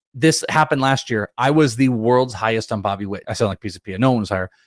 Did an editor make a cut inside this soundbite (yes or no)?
yes